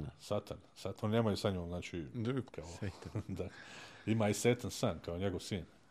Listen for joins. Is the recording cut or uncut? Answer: cut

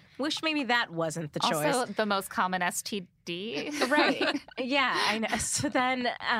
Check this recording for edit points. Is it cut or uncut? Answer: uncut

